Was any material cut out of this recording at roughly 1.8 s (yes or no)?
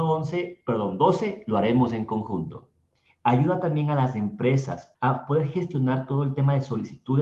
no